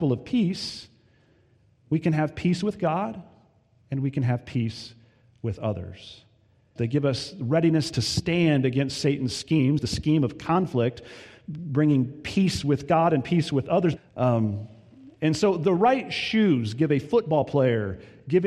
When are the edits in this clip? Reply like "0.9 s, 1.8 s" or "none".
6.8 s, 9.8 s, 14.0 s